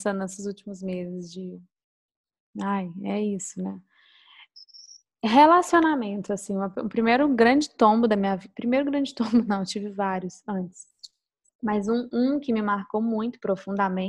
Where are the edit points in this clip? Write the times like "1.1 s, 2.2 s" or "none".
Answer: none

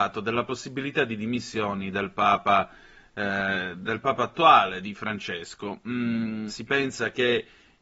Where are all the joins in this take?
6.5 s

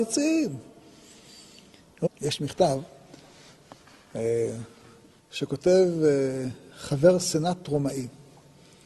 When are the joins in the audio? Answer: 2.1 s, 5.2 s

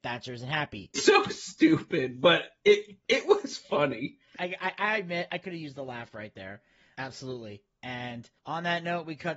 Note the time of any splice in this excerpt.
0.9 s, 4.4 s, 6.9 s

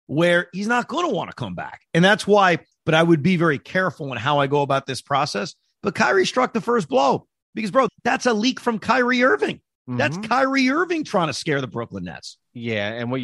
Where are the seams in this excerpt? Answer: 2.7 s, 7.9 s

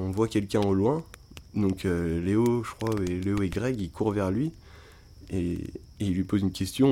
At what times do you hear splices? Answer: none

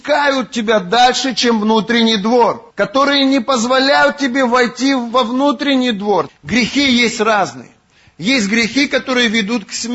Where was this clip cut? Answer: 2.7 s, 6.3 s

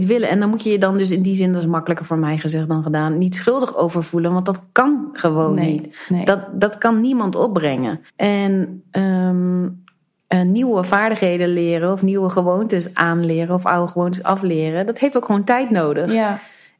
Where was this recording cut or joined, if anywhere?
8.1 s

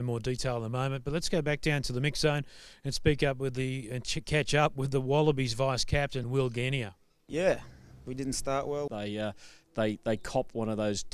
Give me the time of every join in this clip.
6.2 s, 8.9 s

